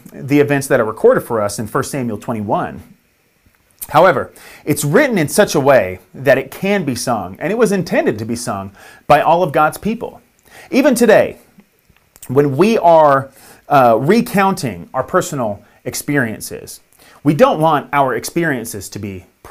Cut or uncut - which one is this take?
uncut